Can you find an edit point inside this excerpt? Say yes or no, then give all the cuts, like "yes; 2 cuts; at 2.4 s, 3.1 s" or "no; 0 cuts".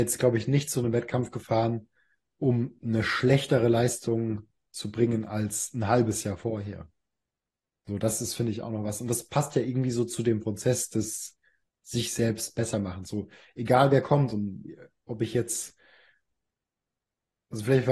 no; 0 cuts